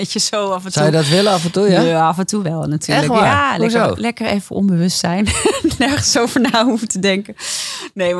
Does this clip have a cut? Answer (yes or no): no